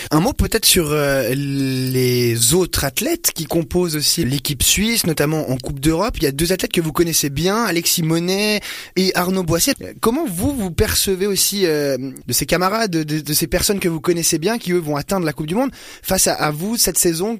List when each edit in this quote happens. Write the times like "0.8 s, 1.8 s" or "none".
9.7 s, 12.2 s